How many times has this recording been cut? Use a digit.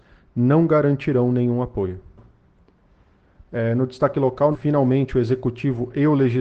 1